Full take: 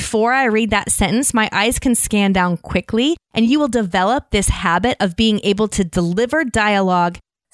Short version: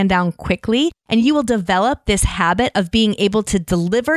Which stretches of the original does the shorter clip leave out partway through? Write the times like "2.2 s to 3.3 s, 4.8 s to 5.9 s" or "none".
none